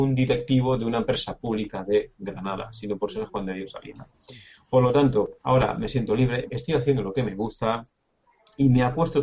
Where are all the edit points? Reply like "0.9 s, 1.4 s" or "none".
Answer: 5.4 s, 6.5 s

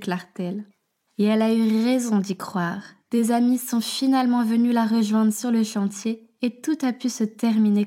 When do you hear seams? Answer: none

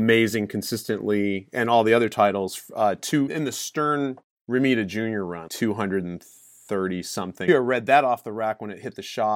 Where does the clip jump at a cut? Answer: 3.3 s, 5.5 s, 7.5 s

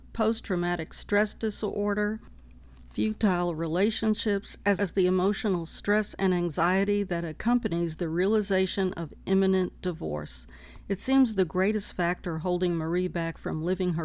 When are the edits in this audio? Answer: 4.8 s

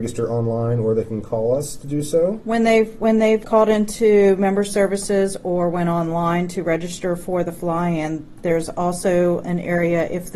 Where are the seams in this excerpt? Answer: 3.4 s, 9.4 s

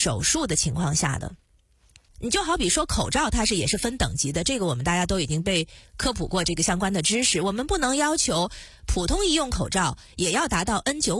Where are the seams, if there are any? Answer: 2.1 s

